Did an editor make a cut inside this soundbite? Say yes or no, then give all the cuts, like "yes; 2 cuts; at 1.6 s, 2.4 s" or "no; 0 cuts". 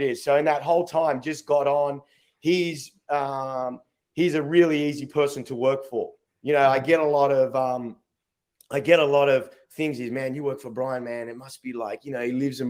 no; 0 cuts